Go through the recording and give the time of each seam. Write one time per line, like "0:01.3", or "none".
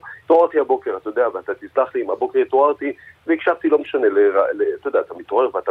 none